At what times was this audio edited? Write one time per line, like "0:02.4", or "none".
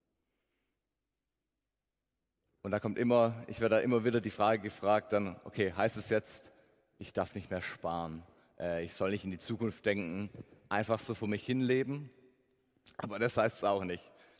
none